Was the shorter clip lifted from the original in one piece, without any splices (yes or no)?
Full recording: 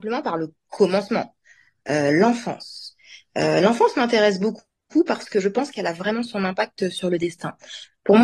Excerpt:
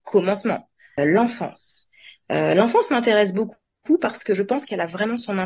no